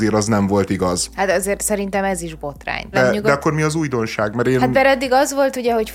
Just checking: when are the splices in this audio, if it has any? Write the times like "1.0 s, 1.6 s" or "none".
2.9 s